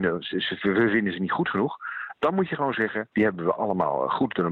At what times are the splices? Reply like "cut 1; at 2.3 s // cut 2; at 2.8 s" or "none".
cut 1; at 3.1 s